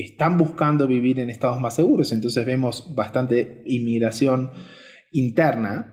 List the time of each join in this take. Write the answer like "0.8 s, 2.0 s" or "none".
none